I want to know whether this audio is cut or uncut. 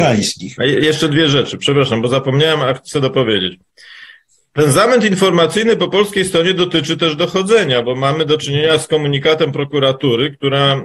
uncut